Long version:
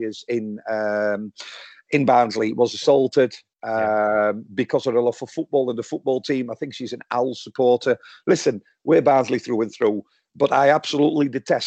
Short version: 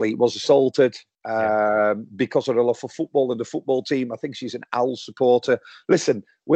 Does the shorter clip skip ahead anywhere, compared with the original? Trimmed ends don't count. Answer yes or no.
no